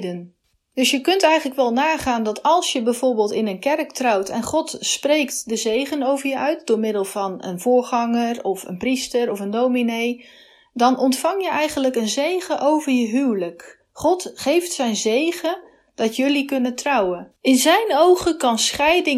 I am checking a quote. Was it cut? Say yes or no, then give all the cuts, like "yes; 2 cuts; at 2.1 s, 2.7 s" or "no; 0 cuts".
yes; 1 cut; at 17.4 s